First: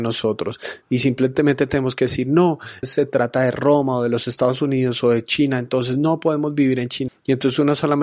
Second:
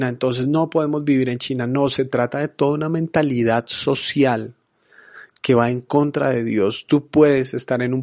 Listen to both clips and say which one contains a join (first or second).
first